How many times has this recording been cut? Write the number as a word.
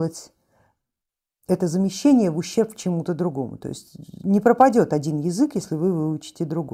zero